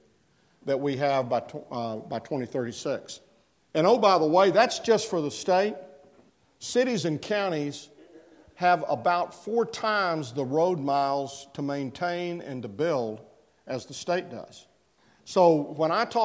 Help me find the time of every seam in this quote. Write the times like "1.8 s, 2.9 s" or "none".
none